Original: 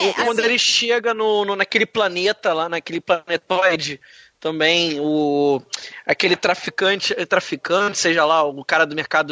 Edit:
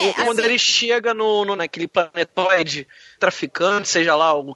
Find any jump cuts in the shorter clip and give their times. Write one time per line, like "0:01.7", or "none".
0:01.6
0:03.2